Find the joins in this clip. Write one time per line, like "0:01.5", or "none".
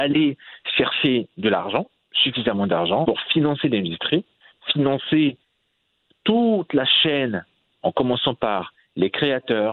0:03.0